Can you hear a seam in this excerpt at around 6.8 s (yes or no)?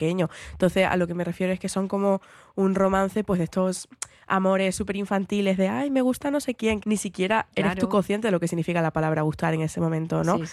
yes